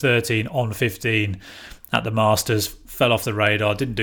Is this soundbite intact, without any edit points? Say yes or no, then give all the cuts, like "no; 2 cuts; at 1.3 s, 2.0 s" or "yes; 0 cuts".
yes; 0 cuts